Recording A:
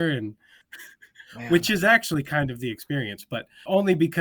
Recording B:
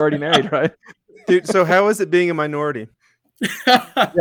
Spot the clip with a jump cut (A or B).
B